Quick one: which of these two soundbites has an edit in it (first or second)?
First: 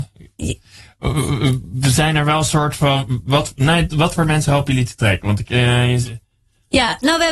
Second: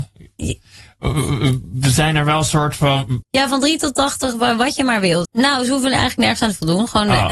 second